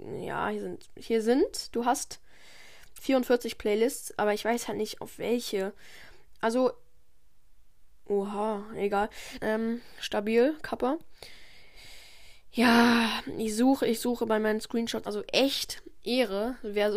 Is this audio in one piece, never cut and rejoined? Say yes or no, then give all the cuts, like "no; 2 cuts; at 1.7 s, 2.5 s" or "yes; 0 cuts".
no; 2 cuts; at 9.4 s, 15.0 s